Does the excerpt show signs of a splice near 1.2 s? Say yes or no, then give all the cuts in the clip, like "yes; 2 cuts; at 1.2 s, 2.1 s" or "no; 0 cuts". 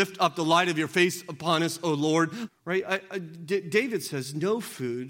no; 1 cut; at 2.5 s